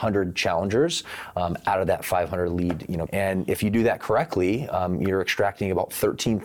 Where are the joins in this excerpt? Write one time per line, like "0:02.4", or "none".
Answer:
0:03.1